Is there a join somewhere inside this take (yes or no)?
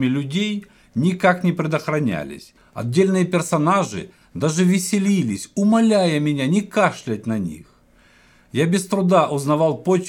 yes